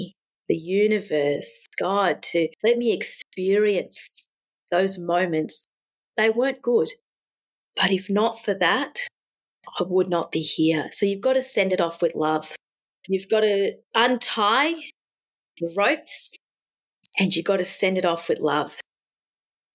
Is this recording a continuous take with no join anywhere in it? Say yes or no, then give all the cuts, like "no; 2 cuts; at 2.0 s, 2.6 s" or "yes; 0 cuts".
yes; 0 cuts